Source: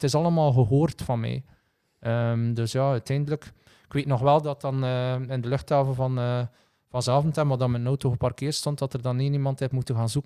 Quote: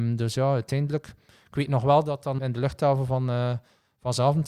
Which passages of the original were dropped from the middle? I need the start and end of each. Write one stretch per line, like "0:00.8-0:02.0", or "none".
0:04.8-0:05.3